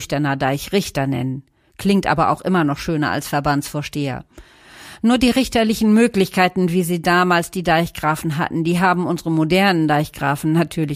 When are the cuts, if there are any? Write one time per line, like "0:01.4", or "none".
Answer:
none